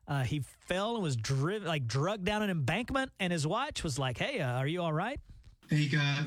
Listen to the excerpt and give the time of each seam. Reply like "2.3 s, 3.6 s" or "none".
none